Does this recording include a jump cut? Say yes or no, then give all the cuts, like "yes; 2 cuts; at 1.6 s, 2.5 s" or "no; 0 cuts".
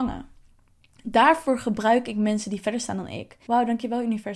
yes; 1 cut; at 3.5 s